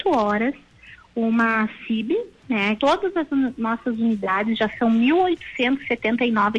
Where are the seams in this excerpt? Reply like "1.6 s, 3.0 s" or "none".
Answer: 2.8 s